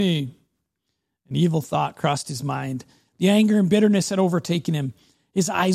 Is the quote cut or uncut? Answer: uncut